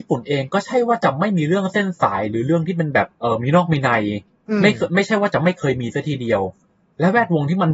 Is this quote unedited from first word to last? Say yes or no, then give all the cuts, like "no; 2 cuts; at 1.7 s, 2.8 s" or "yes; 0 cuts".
no; 1 cut; at 3.1 s